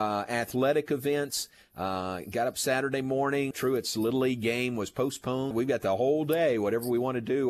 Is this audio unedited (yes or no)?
no